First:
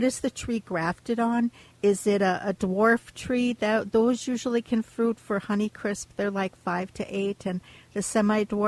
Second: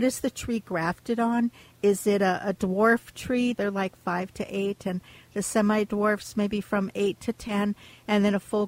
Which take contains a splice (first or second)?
second